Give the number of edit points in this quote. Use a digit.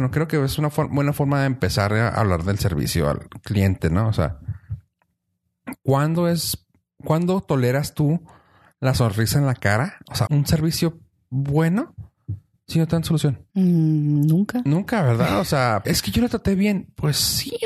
3